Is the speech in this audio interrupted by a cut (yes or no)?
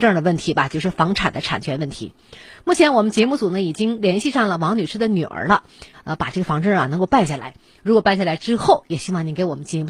yes